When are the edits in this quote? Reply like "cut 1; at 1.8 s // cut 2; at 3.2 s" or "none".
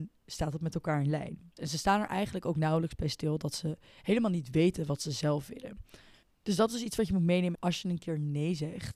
cut 1; at 1.6 s // cut 2; at 6.2 s // cut 3; at 7.6 s